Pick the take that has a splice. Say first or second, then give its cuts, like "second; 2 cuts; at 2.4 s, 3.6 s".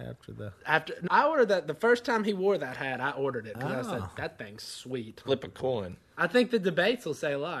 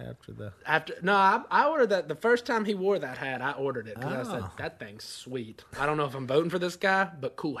first; 2 cuts; at 1.1 s, 5.2 s